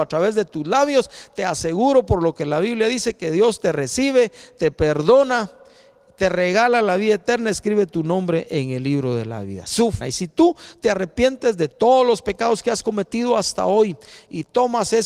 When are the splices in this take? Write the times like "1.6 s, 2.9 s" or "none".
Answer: 10.0 s